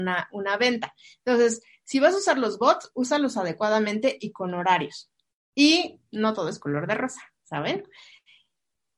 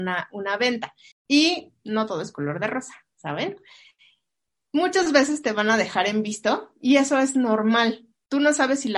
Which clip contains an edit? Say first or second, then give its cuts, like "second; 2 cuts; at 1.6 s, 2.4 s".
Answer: second; 1 cut; at 1.1 s